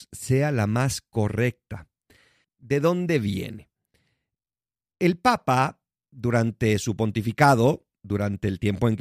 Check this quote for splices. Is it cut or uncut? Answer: cut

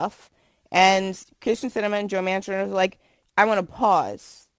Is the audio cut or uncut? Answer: cut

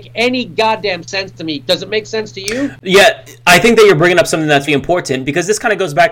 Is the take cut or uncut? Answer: cut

